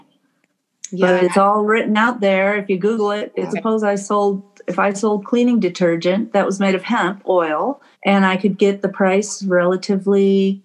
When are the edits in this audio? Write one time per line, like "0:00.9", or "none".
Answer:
0:03.5
0:07.9